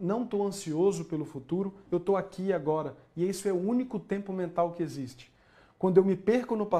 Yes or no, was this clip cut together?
no